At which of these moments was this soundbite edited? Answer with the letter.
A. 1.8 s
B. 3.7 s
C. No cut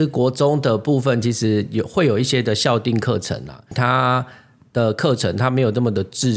B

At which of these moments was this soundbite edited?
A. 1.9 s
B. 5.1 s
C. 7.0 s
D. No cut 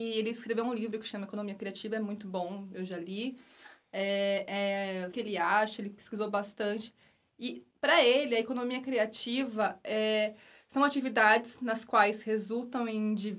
B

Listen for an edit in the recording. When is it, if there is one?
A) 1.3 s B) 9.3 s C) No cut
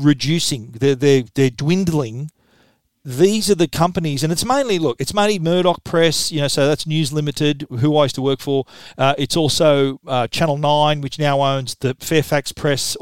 C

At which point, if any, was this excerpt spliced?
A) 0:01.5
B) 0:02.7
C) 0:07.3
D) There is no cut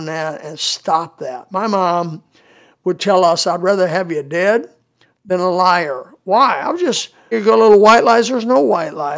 C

